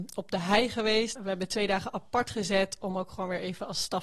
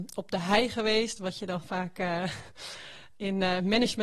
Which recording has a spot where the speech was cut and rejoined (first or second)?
first